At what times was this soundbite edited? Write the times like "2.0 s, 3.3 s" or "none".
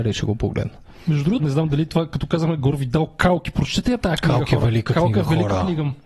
1.4 s